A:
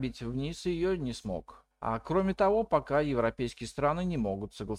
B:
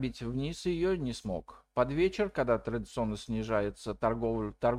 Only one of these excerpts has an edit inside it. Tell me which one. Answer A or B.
A